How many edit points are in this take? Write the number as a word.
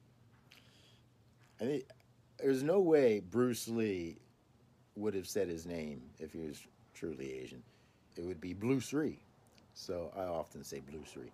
one